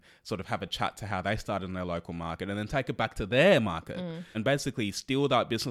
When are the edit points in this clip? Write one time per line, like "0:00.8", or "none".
0:04.3